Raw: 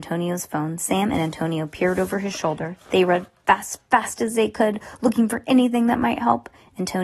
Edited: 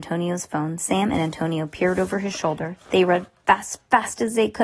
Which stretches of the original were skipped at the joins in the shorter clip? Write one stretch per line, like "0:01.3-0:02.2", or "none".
none